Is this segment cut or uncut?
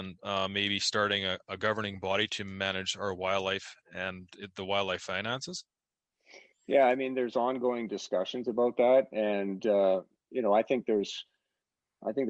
uncut